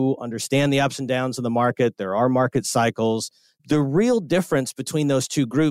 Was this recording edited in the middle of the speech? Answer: yes; 1 cut; at 3.6 s

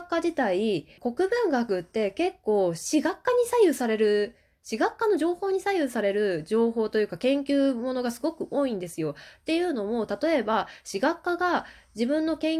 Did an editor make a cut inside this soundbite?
yes; 1 cut; at 1.0 s

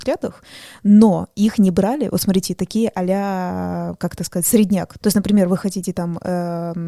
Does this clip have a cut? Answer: yes; 1 cut; at 5.0 s

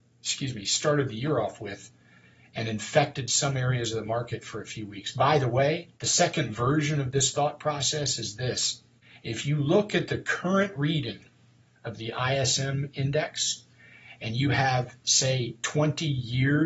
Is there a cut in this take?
yes; 1 cut; at 5.9 s

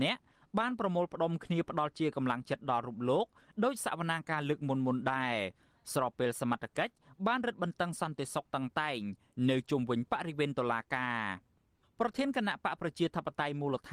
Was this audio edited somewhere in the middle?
no; 0 cuts

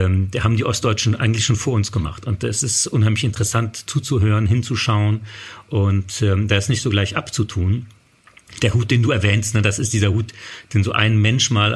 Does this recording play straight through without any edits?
yes; 0 cuts

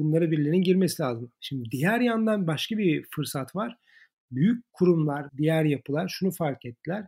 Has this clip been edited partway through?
yes; 1 cut; at 5.3 s

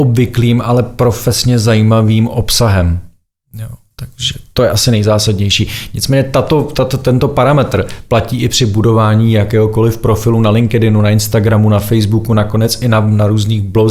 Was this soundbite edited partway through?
no; 0 cuts

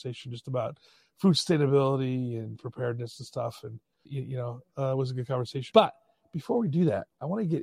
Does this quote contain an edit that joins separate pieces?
yes; 2 cuts; at 4.1 s, 5.7 s

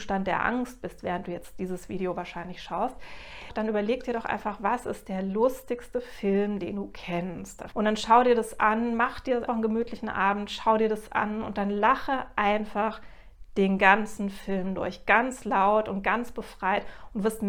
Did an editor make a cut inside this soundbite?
yes; 2 cuts; at 7.7 s, 9.5 s

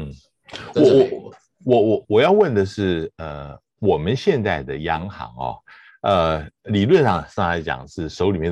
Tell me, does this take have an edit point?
no; 0 cuts

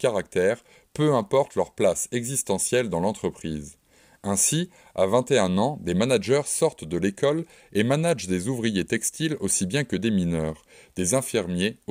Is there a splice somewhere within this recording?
no; 0 cuts

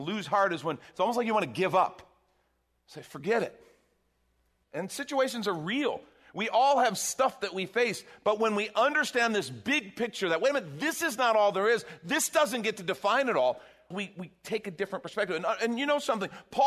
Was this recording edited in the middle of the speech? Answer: yes; 2 cuts; at 4.6 s, 13.9 s

